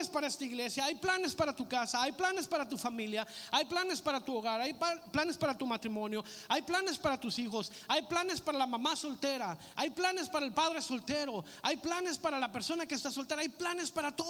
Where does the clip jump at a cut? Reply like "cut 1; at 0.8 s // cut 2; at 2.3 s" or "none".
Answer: none